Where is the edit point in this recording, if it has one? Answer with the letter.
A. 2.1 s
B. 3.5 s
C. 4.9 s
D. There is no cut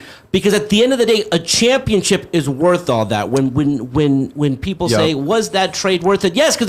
D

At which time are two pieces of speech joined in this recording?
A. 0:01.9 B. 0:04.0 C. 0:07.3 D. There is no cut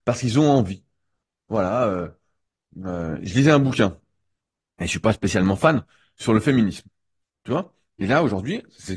C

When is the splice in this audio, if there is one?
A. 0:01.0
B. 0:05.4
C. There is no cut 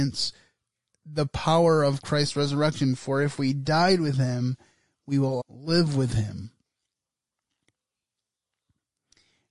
B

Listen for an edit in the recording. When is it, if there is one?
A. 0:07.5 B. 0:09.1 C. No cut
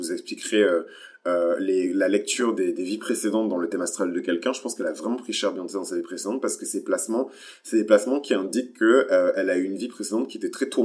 C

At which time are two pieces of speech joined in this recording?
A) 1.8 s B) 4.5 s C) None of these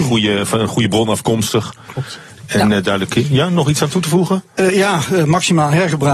C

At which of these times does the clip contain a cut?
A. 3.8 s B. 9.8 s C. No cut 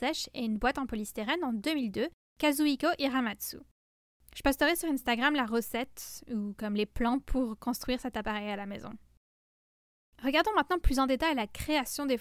C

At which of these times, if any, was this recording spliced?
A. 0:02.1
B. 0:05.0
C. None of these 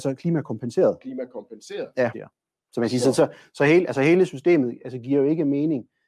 A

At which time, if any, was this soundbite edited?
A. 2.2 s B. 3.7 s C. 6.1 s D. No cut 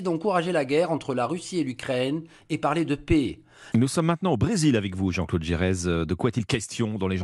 B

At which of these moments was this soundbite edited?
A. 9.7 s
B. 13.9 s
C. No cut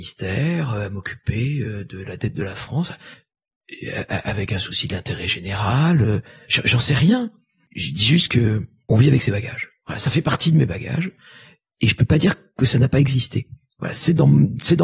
B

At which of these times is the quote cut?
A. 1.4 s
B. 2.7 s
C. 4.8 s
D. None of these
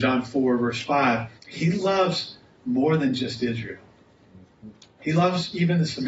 A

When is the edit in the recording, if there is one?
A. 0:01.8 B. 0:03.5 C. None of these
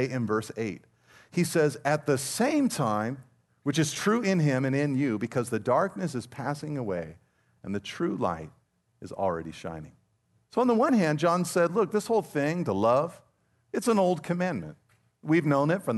B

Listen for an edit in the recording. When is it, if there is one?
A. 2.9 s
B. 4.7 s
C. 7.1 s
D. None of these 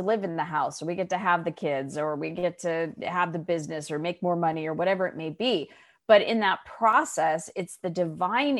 D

